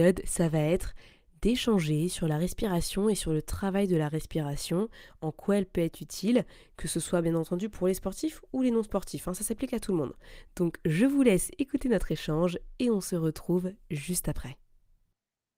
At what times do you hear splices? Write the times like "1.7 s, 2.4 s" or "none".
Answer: none